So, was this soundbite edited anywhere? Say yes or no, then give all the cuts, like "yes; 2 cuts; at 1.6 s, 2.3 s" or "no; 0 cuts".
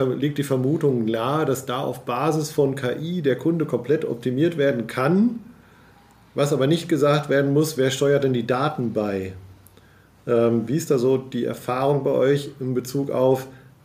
no; 0 cuts